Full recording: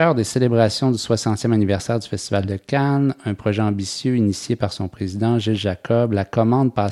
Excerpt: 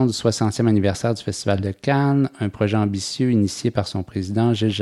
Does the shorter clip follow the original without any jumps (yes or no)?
yes